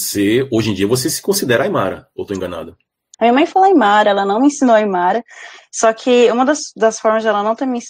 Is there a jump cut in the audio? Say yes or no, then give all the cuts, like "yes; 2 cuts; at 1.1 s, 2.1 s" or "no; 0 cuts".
yes; 1 cut; at 3.1 s